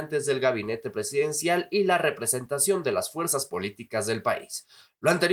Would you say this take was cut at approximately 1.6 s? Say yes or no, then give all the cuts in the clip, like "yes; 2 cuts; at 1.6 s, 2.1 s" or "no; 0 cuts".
no; 0 cuts